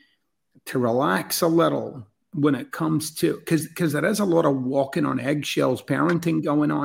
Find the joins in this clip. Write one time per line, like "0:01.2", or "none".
0:02.2